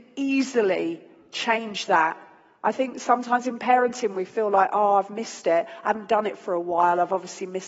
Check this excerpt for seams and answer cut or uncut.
uncut